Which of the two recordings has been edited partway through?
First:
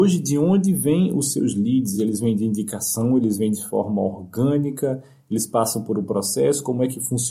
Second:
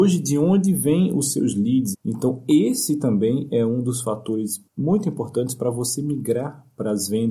second; 2 cuts; at 1.9 s, 4.7 s

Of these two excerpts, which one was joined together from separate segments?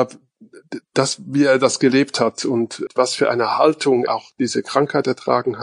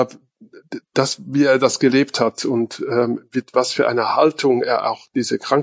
first; 2 cuts; at 2.9 s, 4.1 s

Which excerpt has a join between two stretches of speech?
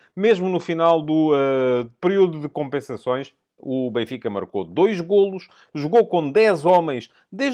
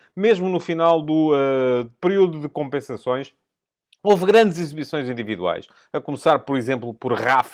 first; 1 cut; at 3.6 s

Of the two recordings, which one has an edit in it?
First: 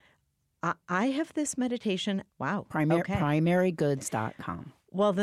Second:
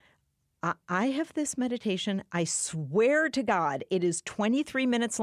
first; 1 cut; at 2.3 s

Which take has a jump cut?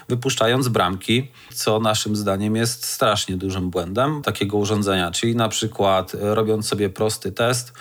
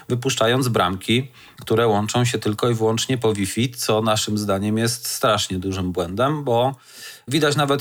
first; 2 cuts; at 1.5 s, 4.2 s

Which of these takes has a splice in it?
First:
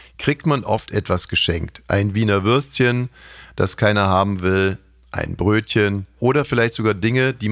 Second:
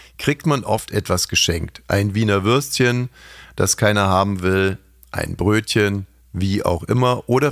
first; 1 cut; at 6.2 s

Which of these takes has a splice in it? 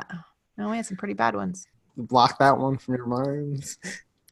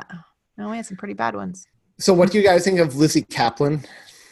first; 1 cut; at 1.9 s

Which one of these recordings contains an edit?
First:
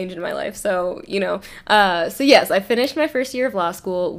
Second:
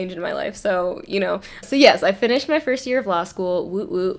second; 1 cut; at 1.6 s

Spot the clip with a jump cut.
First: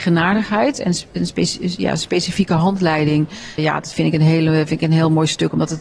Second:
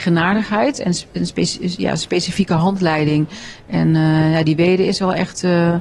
first; 1 cut; at 3.6 s

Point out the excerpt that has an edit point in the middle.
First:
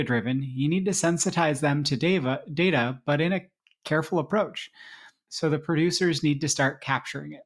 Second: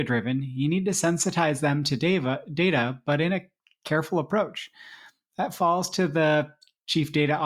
first; 1 cut; at 5.3 s

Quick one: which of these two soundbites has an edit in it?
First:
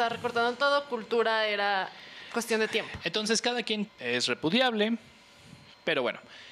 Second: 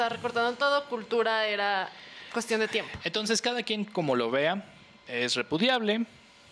first; 1 cut; at 3.9 s

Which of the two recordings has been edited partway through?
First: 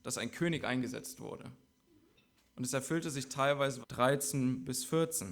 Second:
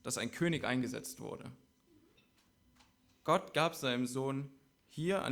first; 2 cuts; at 2.4 s, 3.8 s

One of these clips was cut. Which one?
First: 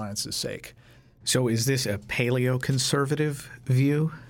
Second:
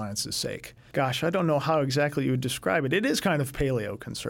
second; 1 cut; at 0.9 s

